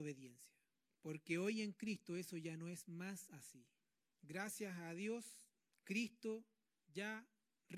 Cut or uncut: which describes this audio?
uncut